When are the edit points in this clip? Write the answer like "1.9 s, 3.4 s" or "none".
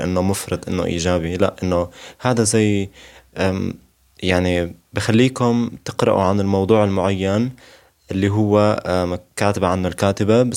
none